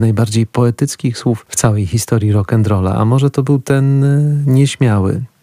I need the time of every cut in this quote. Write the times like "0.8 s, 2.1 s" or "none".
none